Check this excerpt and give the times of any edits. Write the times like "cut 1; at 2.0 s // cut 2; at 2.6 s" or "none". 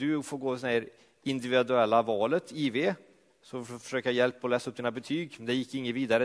none